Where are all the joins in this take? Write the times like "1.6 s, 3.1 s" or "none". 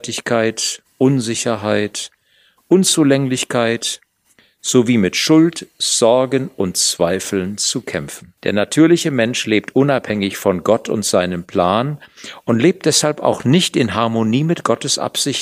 8.4 s